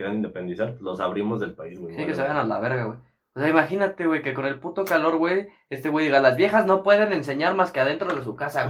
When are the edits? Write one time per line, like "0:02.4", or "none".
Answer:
none